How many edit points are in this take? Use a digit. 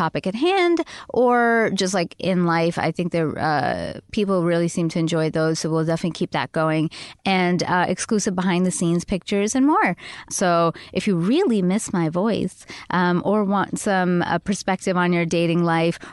1